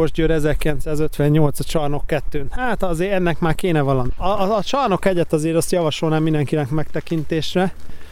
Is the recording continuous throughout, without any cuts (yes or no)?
no